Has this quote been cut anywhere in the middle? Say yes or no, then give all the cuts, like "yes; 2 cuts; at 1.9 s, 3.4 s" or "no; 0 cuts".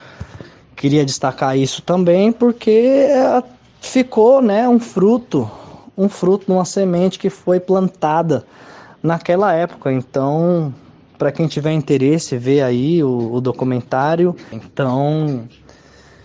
yes; 1 cut; at 14.5 s